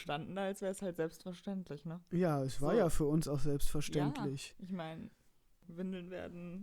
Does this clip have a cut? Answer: no; 0 cuts

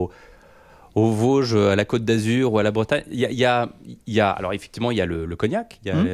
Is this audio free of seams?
yes; 0 cuts

